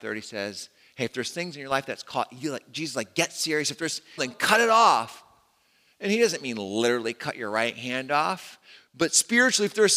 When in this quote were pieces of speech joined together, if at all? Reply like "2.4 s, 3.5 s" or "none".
4.2 s